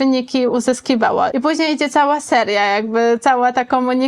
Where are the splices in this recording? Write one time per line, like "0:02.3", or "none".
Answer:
0:01.3